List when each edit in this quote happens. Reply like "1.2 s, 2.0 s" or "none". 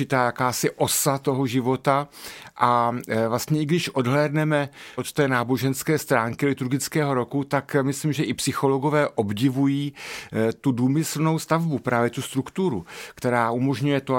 5.0 s